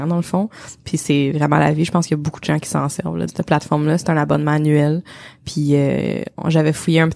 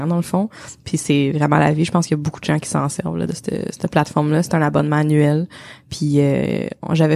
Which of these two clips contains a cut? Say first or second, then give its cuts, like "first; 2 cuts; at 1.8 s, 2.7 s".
first; 1 cut; at 3.3 s